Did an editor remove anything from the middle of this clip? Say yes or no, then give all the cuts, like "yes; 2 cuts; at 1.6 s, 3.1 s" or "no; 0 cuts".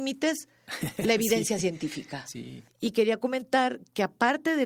yes; 1 cut; at 2.7 s